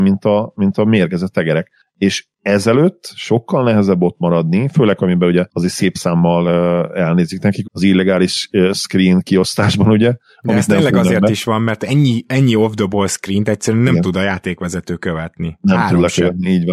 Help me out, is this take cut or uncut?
cut